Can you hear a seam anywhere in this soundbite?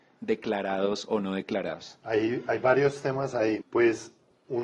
yes; 1 cut; at 3.6 s

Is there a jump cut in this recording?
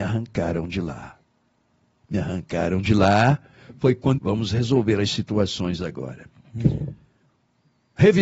yes; 1 cut; at 4.2 s

